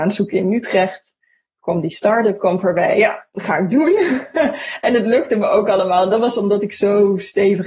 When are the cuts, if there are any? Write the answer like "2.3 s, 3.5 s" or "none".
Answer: none